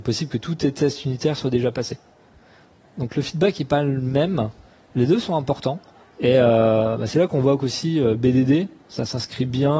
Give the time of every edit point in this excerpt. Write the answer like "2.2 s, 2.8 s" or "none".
6.0 s